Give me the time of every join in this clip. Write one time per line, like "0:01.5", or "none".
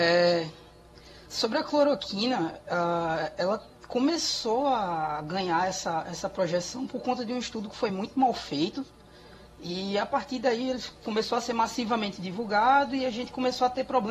none